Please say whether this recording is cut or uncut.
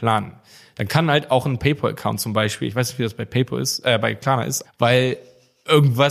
cut